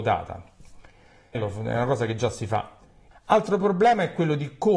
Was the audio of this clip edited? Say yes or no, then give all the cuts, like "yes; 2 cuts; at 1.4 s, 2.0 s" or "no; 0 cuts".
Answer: yes; 2 cuts; at 1.3 s, 3.1 s